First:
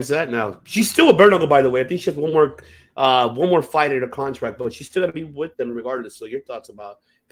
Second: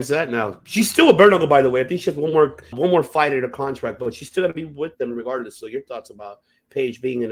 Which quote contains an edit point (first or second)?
second